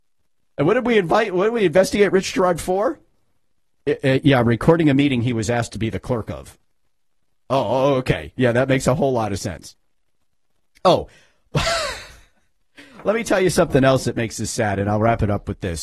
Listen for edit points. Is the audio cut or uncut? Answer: uncut